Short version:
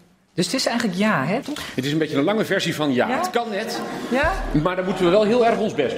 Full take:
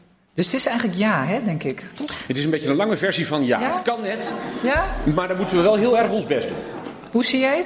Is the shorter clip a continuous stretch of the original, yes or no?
no